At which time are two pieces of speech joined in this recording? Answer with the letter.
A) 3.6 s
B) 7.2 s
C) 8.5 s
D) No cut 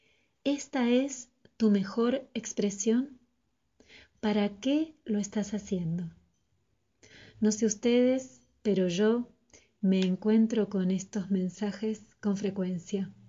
D